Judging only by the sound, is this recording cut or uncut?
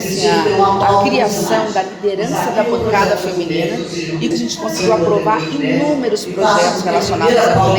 cut